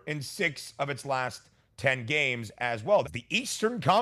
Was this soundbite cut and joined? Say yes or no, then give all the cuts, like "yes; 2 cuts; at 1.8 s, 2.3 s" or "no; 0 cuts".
yes; 1 cut; at 3.0 s